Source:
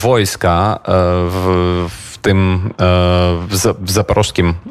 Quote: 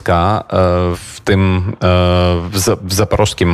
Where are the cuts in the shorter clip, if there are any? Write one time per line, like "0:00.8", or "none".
0:00.9